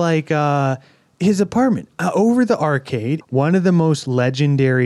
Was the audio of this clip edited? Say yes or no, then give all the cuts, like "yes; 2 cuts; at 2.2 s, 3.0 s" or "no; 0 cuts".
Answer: yes; 1 cut; at 3.2 s